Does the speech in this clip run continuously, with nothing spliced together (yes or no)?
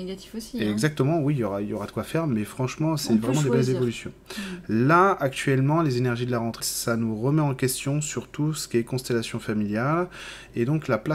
no